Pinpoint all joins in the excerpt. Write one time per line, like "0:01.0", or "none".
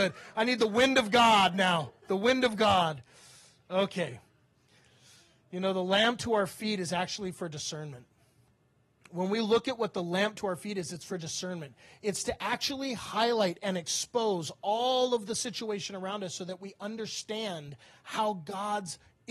none